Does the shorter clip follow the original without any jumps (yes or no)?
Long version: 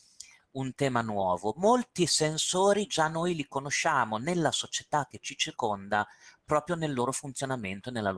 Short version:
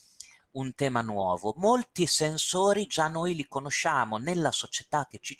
yes